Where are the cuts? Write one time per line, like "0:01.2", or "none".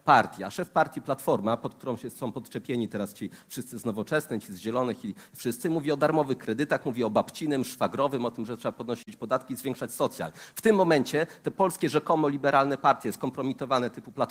none